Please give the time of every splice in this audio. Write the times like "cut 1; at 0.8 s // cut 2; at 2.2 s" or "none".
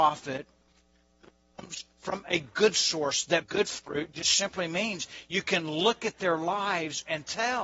none